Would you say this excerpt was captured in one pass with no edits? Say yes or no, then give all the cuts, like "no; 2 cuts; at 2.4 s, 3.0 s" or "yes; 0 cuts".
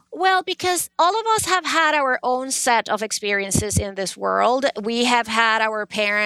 yes; 0 cuts